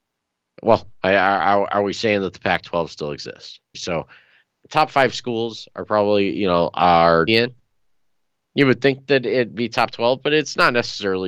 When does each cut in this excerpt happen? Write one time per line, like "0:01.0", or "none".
0:03.7
0:07.3